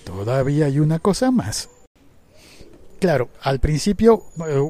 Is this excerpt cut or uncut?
uncut